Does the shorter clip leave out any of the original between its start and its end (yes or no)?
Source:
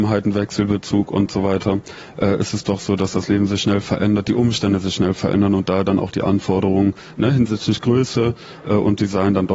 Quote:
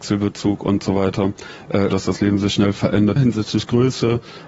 yes